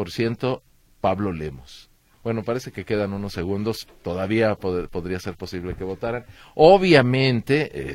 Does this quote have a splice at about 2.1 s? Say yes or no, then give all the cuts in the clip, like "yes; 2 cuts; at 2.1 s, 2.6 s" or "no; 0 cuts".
yes; 1 cut; at 2.1 s